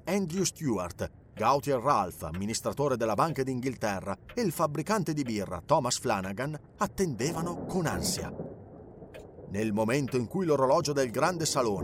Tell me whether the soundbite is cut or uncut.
uncut